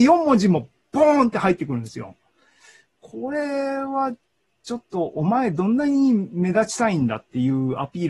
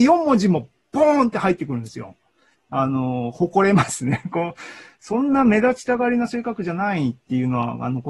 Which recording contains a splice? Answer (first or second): second